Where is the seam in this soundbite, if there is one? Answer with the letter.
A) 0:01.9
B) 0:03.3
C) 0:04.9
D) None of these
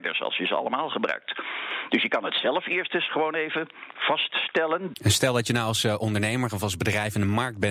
C